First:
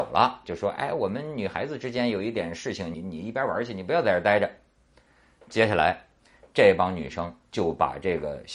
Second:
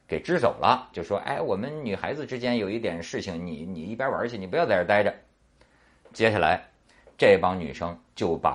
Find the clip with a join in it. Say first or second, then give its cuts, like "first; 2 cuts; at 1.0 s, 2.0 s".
first; 1 cut; at 2.9 s